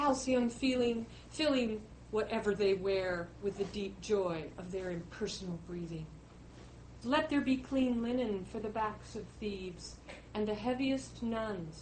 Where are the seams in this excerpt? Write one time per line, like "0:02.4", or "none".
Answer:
0:07.0
0:10.3